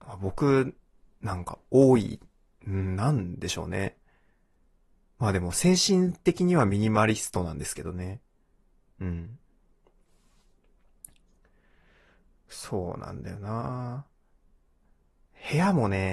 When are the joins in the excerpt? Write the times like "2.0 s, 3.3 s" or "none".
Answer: none

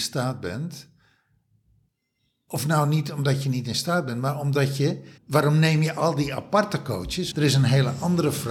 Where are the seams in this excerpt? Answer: 5.2 s, 7.3 s

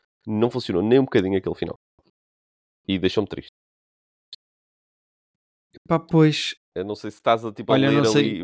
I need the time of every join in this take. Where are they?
6.6 s

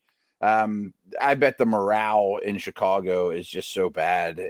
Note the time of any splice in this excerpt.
1.2 s

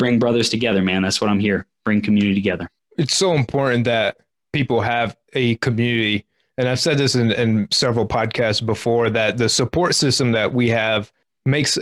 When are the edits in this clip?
none

